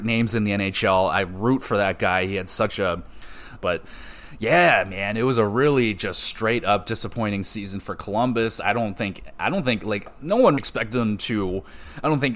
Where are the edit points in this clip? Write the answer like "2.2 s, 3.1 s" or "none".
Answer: 3.6 s, 10.6 s